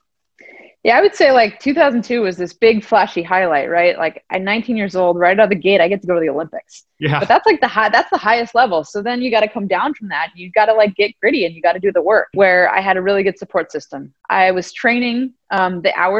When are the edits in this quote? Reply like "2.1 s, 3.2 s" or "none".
12.3 s, 14.2 s